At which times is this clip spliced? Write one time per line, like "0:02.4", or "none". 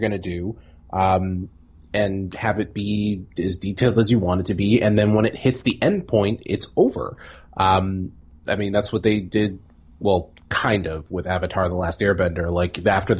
none